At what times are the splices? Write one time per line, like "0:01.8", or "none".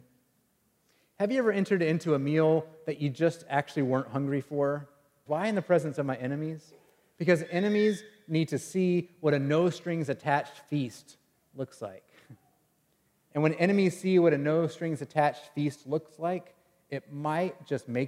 0:05.3